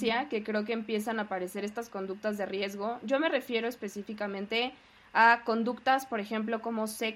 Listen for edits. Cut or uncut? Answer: uncut